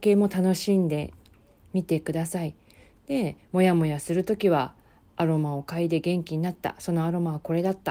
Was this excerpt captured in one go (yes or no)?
yes